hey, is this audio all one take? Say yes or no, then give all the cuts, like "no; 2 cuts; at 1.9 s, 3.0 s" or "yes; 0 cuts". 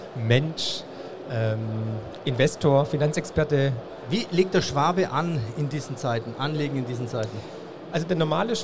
yes; 0 cuts